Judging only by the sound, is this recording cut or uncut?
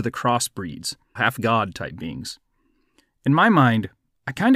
cut